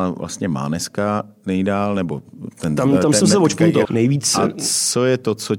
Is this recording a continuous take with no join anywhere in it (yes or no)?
no